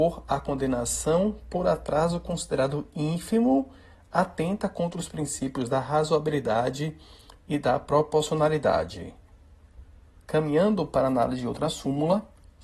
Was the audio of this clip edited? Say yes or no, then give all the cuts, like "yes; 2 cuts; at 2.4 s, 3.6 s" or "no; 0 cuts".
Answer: yes; 1 cut; at 10.1 s